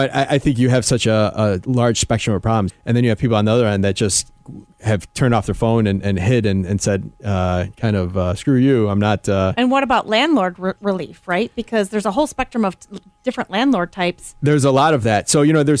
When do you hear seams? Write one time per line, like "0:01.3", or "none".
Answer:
0:02.7